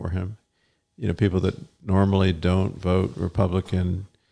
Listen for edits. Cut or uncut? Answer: uncut